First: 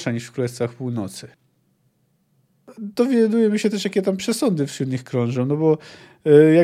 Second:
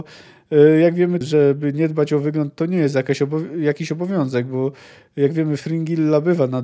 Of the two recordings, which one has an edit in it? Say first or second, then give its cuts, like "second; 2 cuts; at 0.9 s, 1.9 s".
second; 1 cut; at 1.2 s